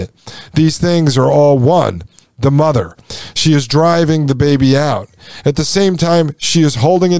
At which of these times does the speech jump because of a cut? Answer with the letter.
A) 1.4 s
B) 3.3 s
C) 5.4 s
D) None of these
D